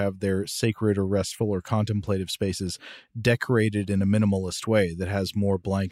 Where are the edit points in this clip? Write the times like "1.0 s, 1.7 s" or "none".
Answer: none